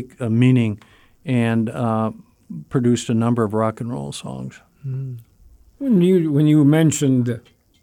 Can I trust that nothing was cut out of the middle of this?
yes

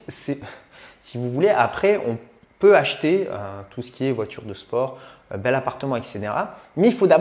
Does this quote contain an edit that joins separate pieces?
no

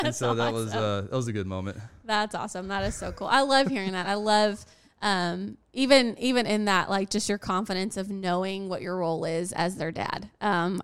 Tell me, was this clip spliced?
no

